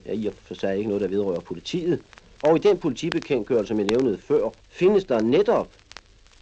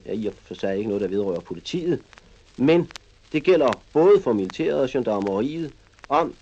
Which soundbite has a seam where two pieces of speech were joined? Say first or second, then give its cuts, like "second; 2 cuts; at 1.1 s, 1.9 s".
first; 2 cuts; at 2.4 s, 4.6 s